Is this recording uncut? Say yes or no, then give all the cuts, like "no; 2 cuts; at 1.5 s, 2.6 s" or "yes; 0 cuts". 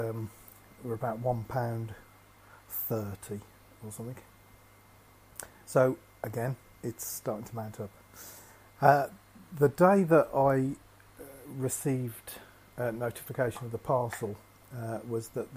yes; 0 cuts